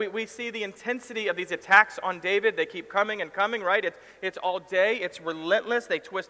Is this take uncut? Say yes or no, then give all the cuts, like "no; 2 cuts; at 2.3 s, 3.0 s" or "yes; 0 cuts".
yes; 0 cuts